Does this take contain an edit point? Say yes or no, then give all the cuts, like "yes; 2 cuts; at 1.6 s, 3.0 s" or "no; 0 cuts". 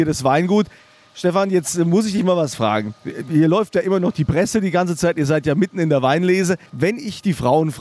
yes; 1 cut; at 6.7 s